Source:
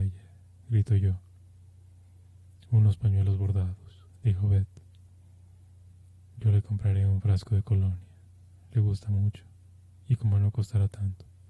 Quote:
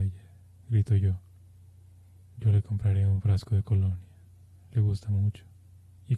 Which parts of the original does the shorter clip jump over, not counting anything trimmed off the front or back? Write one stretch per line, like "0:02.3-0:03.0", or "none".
0:02.2-0:06.2